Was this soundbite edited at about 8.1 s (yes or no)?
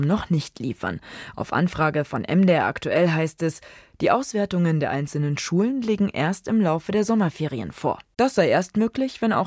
yes